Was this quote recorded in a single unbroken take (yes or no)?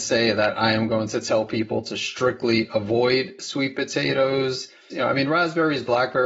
no